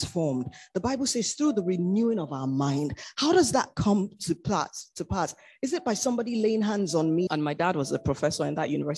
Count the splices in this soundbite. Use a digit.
1